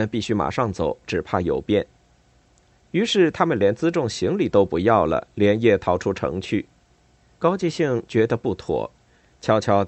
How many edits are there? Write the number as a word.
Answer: two